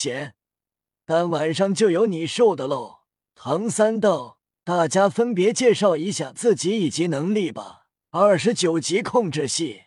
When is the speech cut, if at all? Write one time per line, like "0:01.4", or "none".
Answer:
0:03.2
0:08.0